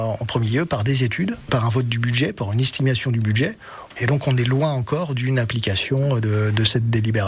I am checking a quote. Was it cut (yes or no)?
no